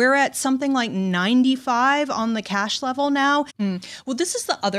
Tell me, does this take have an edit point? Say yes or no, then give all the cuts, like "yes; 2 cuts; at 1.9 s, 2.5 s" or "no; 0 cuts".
yes; 1 cut; at 3.5 s